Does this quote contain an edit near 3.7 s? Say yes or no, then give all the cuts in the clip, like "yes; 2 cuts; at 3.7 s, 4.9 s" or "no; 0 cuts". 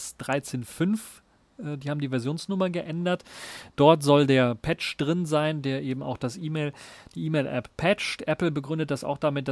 no; 0 cuts